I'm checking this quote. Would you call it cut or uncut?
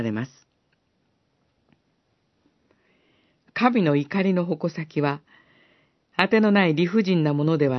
uncut